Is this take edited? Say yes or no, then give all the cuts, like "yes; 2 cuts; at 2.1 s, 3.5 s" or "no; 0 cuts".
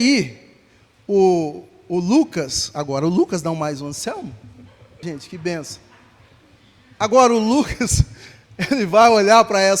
yes; 1 cut; at 5.0 s